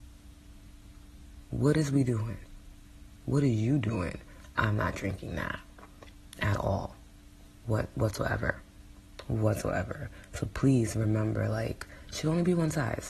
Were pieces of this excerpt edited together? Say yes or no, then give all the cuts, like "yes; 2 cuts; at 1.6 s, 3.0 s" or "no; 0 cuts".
no; 0 cuts